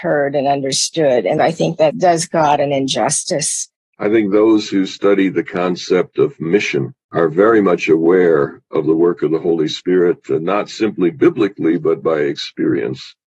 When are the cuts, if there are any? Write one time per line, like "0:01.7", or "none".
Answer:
none